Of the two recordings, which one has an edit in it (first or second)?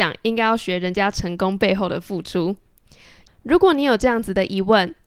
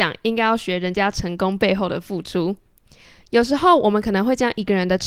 first